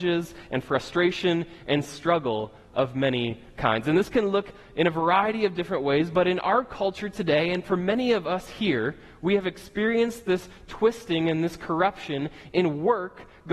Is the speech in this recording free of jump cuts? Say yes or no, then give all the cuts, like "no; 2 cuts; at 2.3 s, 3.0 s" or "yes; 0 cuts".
yes; 0 cuts